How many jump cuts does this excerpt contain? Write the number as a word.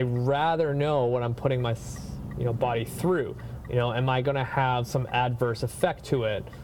one